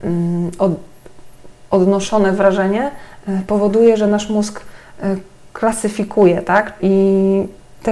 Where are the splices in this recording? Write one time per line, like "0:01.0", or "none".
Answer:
0:06.8